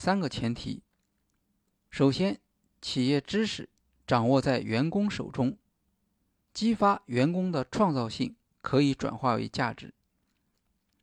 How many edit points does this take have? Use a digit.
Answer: 0